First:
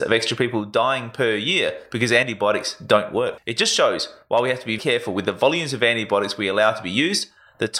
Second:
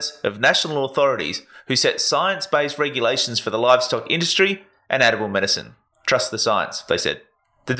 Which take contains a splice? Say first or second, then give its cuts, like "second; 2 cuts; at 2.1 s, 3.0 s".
first; 1 cut; at 4.8 s